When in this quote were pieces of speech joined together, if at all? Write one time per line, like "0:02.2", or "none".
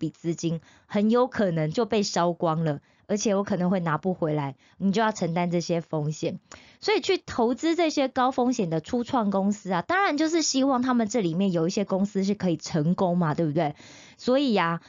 none

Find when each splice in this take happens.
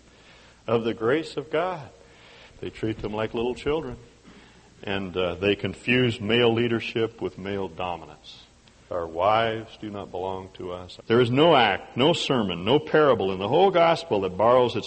0:02.5
0:08.9
0:11.0

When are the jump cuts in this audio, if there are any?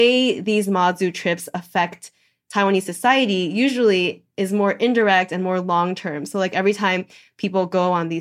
none

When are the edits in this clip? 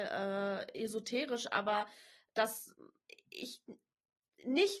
none

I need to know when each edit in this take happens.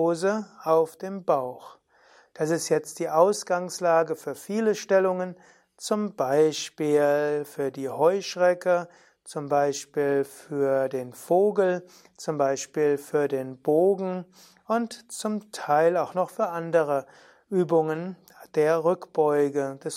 none

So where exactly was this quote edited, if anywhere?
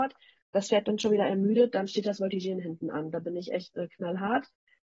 none

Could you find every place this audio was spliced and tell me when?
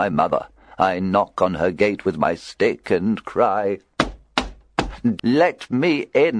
0:05.2

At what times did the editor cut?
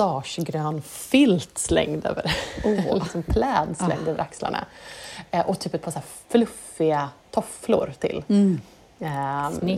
none

